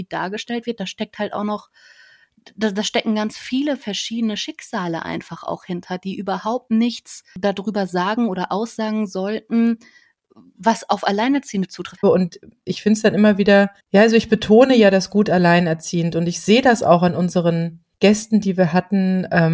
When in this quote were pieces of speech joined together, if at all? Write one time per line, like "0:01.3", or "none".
0:12.0
0:13.8
0:17.9